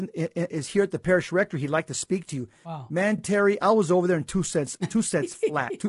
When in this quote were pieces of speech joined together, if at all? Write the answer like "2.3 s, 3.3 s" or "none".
none